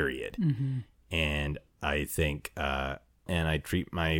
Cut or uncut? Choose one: cut